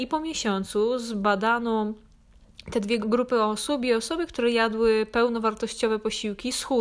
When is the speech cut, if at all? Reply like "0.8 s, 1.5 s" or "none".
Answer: 3.0 s